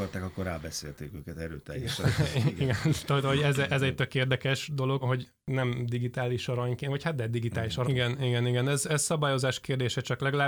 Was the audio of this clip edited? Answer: yes; 2 cuts; at 5.0 s, 7.8 s

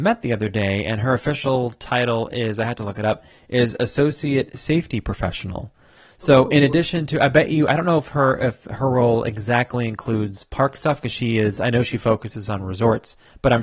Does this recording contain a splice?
no; 0 cuts

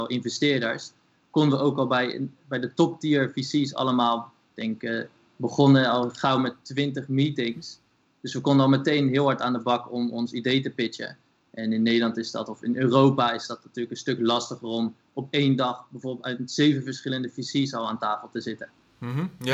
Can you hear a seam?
no; 0 cuts

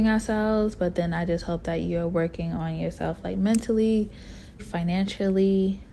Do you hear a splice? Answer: yes; 1 cut; at 4.6 s

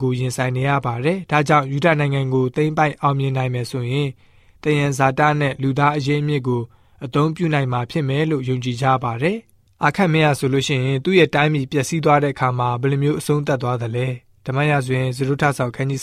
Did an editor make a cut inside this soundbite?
no; 0 cuts

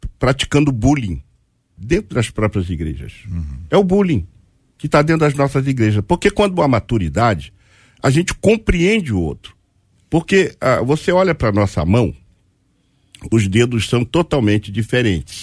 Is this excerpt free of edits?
yes; 0 cuts

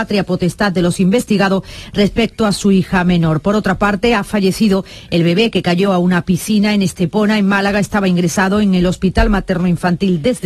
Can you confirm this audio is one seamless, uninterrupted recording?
yes; 0 cuts

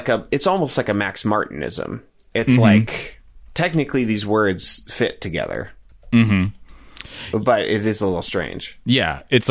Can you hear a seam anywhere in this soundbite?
no; 0 cuts

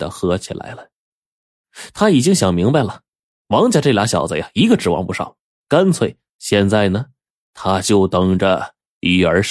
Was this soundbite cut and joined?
yes; 1 cut; at 6.3 s

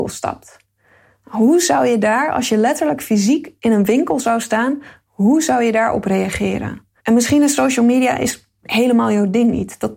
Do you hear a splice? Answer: yes; 1 cut; at 7.0 s

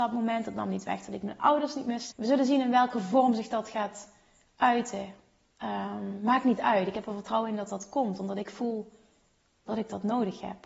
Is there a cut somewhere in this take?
yes; 1 cut; at 2.1 s

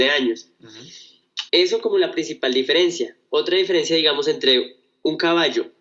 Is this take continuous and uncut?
no; 1 cut; at 1.5 s

